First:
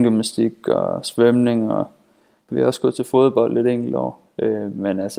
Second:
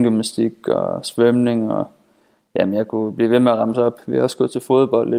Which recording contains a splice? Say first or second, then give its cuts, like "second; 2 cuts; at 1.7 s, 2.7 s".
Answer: first; 1 cut; at 2.5 s